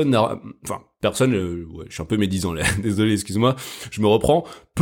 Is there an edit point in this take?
no; 0 cuts

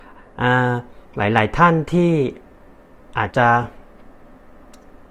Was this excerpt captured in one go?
no; 1 cut; at 3.3 s

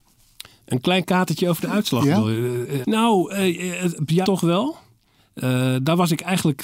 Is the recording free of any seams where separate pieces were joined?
no; 2 cuts; at 2.8 s, 4.2 s

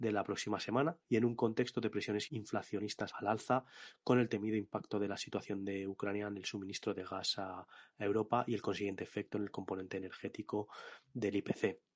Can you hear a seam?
yes; 1 cut; at 1.0 s

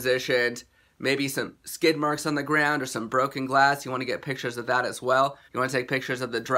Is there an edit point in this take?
yes; 2 cuts; at 1.6 s, 5.5 s

